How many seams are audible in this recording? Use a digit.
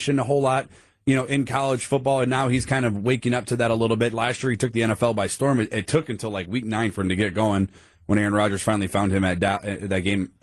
0